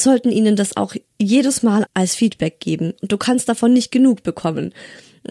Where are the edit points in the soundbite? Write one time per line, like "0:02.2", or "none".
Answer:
0:01.9